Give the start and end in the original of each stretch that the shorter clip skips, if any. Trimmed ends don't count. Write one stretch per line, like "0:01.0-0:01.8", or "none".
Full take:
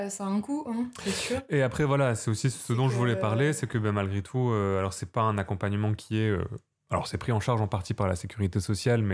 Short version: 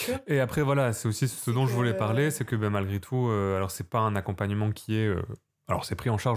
none